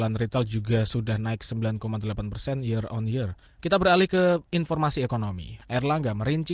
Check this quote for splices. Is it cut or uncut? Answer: cut